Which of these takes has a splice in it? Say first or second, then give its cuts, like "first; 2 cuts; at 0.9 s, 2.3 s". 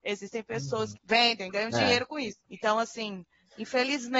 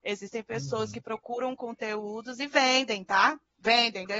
first; 1 cut; at 0.9 s